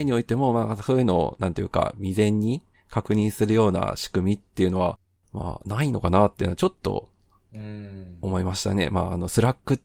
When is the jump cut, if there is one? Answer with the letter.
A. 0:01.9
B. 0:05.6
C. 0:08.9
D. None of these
B